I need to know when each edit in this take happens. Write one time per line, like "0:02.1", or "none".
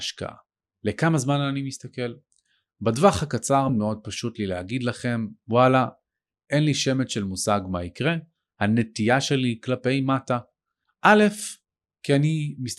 0:03.7
0:10.8